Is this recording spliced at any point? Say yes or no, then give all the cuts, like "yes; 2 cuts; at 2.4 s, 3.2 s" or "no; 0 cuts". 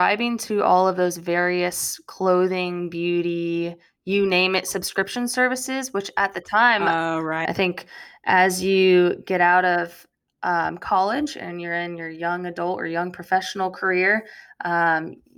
yes; 1 cut; at 7.4 s